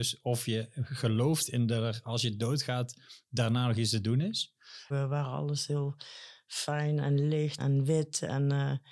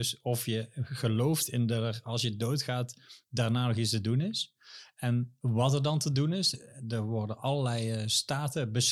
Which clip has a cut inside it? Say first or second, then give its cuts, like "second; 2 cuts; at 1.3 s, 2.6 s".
first; 2 cuts; at 4.9 s, 7.6 s